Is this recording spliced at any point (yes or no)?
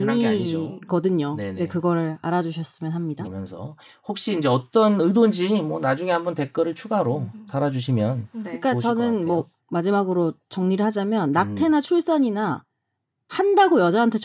yes